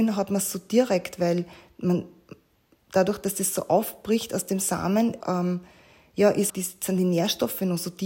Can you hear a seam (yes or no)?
yes